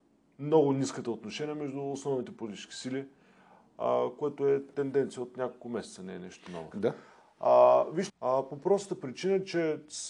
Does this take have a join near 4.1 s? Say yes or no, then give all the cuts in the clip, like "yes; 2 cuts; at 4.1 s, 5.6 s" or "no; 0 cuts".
no; 2 cuts; at 6.7 s, 8.1 s